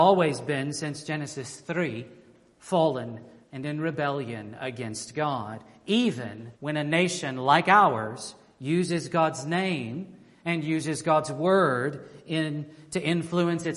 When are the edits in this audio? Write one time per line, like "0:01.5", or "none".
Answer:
0:03.4
0:06.6